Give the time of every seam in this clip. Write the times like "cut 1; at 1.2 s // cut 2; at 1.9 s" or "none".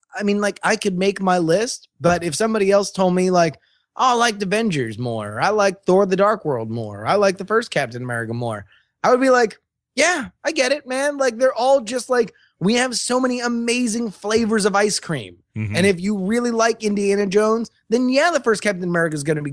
none